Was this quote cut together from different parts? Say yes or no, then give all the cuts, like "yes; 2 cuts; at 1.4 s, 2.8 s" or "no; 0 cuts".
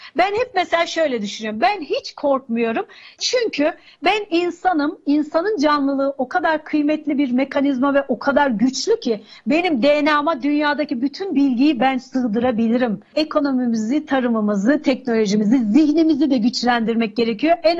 yes; 1 cut; at 13.1 s